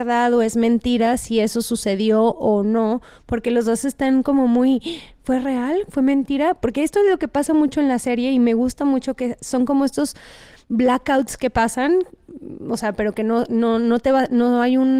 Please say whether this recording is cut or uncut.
uncut